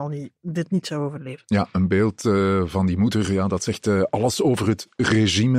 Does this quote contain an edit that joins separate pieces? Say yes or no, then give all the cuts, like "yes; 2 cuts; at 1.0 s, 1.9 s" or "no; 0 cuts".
no; 0 cuts